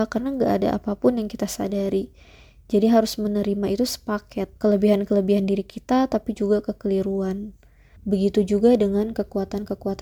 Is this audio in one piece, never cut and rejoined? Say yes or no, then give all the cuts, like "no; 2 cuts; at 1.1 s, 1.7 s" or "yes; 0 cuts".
no; 2 cuts; at 4.6 s, 8.0 s